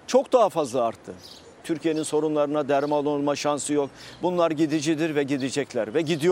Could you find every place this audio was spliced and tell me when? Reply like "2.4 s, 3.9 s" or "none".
1.6 s